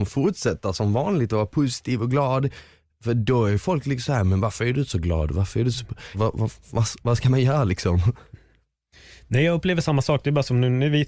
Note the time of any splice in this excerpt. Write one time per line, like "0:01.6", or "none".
0:06.1